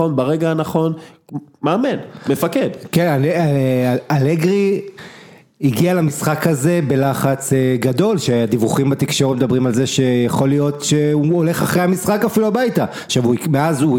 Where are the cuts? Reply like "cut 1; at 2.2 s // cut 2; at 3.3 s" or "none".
none